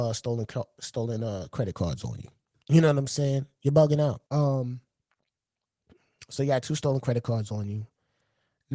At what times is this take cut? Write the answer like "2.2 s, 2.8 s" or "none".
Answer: 2.6 s, 4.3 s